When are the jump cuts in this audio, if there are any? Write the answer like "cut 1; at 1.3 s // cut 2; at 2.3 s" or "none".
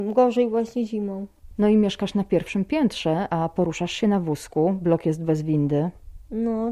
none